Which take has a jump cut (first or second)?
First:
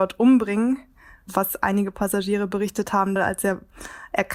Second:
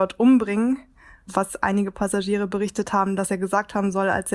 first